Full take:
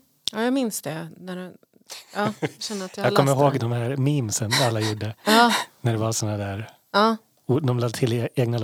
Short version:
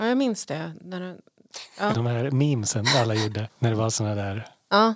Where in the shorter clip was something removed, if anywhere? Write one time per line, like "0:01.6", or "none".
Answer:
0:01.9
0:03.5